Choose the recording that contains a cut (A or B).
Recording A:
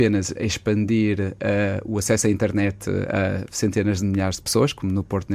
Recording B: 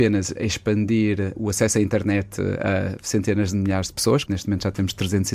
B